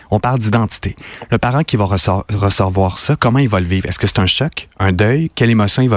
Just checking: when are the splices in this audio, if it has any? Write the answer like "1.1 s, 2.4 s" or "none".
none